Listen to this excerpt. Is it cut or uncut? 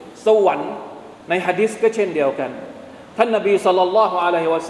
cut